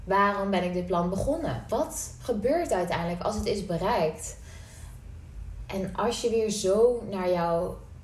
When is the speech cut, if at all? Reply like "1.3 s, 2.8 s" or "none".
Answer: 1.7 s